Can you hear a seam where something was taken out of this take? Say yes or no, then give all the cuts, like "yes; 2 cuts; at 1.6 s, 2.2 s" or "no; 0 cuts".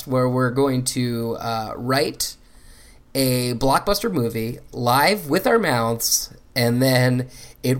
no; 0 cuts